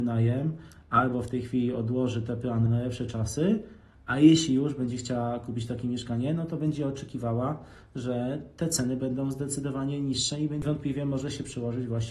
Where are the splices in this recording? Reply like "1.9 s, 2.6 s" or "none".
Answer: 2.7 s